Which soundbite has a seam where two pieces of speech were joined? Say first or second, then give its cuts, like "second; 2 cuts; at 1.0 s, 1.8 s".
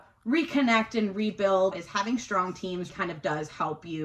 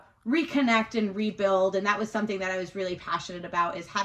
first; 2 cuts; at 1.7 s, 2.9 s